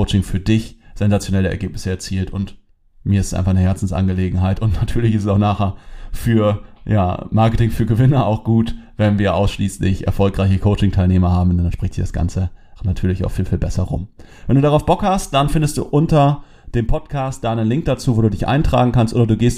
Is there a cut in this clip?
yes; 1 cut; at 12.8 s

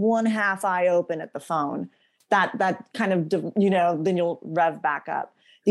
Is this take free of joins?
yes; 0 cuts

